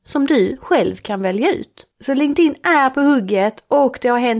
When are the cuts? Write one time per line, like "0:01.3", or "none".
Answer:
0:01.9